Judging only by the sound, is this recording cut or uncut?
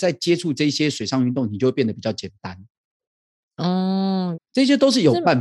cut